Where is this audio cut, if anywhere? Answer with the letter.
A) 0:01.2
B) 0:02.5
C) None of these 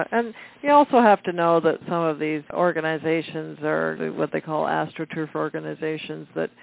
B